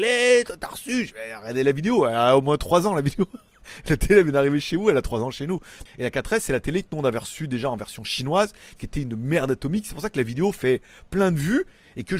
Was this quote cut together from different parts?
yes; 1 cut; at 5.9 s

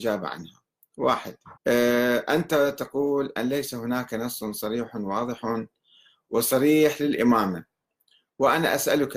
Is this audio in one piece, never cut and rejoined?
no; 1 cut; at 1.6 s

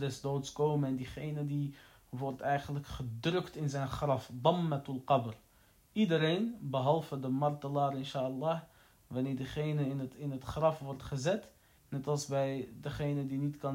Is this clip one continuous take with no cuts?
no; 1 cut; at 11.8 s

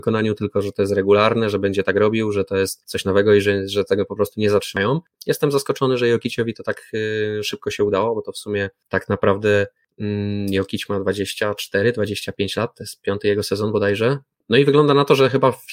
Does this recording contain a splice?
yes; 1 cut; at 5.1 s

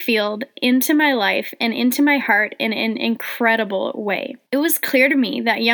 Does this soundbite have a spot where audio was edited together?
yes; 1 cut; at 4.5 s

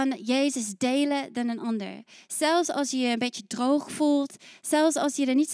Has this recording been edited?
no; 0 cuts

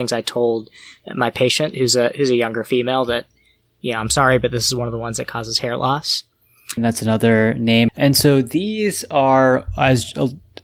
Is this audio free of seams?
no; 2 cuts; at 6.8 s, 7.9 s

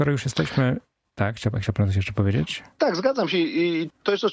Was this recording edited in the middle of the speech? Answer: yes; 1 cut; at 2.7 s

